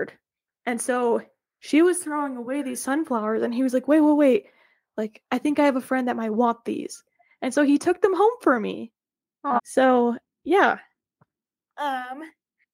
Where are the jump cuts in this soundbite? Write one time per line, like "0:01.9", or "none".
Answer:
0:09.6